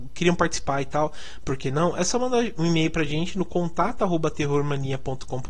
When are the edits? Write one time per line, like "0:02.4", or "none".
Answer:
0:02.6